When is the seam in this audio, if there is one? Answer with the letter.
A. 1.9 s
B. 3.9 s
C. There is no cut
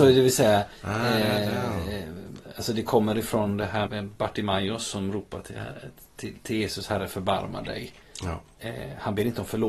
B